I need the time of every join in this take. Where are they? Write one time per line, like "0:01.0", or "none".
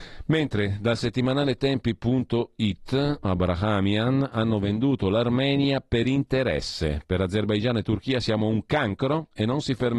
0:03.2